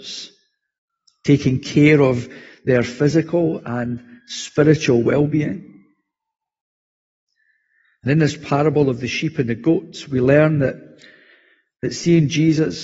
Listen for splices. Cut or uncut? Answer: uncut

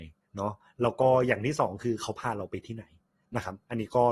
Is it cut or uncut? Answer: uncut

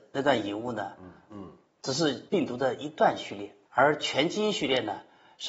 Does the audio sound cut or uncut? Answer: cut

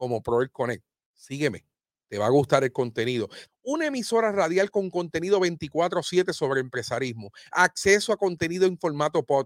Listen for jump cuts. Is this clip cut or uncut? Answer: cut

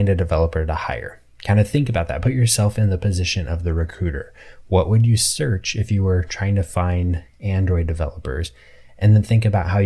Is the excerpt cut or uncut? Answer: uncut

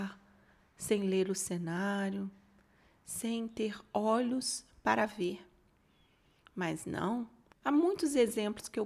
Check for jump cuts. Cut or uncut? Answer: cut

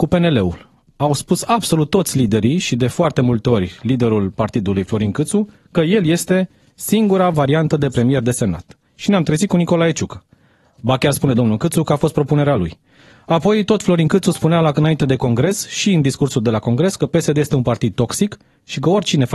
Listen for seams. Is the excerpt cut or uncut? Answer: uncut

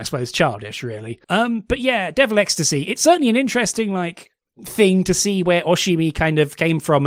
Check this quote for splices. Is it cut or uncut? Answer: cut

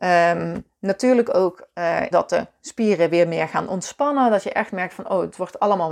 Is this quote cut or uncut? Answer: cut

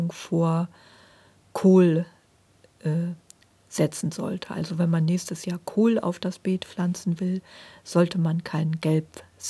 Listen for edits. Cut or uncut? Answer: uncut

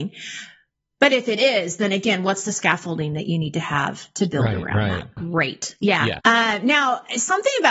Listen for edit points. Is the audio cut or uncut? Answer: cut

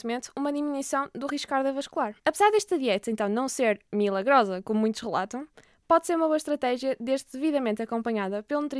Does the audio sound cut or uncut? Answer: cut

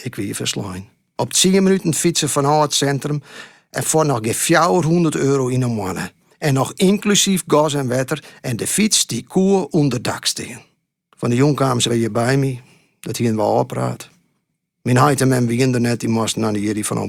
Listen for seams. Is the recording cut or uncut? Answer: cut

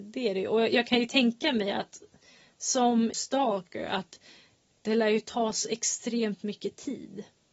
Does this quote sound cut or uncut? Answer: cut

